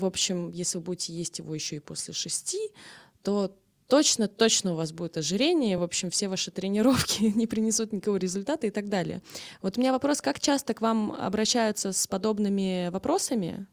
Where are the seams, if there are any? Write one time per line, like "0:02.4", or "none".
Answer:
none